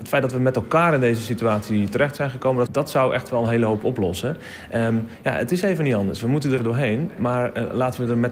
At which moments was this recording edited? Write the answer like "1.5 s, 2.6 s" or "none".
2.7 s, 6.6 s